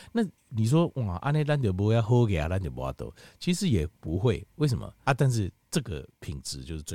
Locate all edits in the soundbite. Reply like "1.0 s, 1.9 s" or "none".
5.1 s